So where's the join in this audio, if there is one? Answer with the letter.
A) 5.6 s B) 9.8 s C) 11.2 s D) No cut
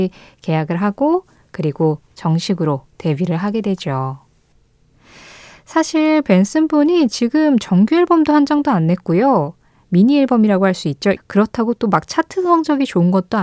C